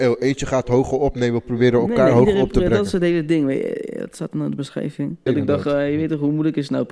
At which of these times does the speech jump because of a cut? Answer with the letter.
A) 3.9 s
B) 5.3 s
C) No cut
B